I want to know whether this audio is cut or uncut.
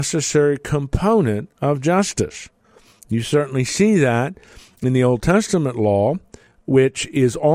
uncut